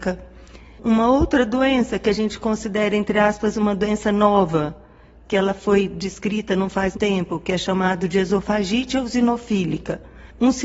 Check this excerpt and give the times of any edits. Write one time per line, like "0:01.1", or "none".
0:06.9